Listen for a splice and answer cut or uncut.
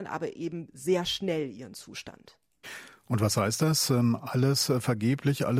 uncut